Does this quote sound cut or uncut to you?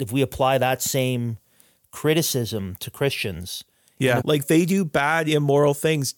cut